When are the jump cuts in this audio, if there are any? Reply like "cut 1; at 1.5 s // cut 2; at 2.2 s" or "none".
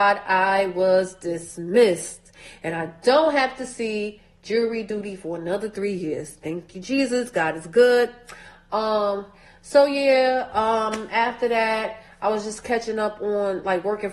none